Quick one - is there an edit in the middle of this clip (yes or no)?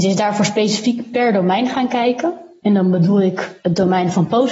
no